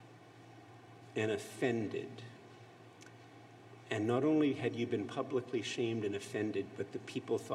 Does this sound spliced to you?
no; 0 cuts

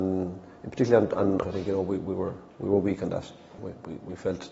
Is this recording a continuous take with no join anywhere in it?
no; 2 cuts; at 1.4 s, 3.6 s

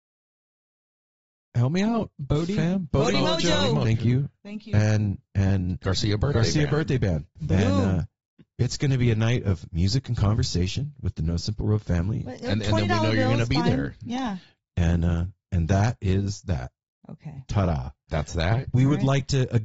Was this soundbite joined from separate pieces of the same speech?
yes; 2 cuts; at 7.4 s, 12.3 s

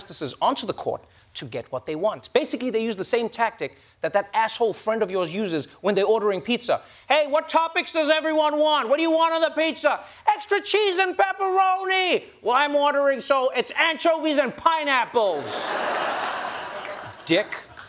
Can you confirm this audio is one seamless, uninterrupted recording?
yes; 0 cuts

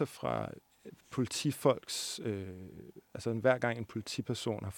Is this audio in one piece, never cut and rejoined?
yes; 0 cuts

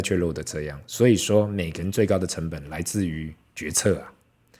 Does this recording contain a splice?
no; 0 cuts

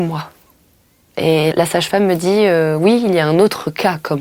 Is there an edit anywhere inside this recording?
yes; 1 cut; at 1.5 s

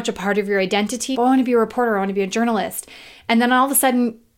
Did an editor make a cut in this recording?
yes; 1 cut; at 1.1 s

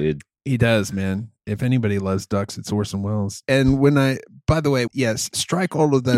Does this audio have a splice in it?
yes; 2 cuts; at 3.4 s, 4.9 s

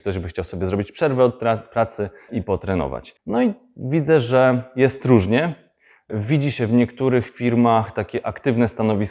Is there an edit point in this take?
yes; 1 cut; at 3.2 s

